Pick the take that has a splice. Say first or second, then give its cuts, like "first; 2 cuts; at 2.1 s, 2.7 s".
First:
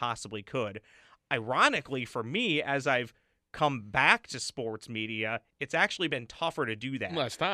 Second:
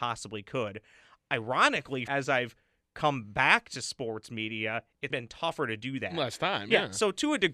second; 2 cuts; at 2.1 s, 5.1 s